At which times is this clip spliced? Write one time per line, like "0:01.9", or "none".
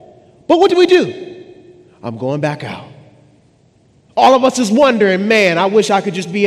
0:04.1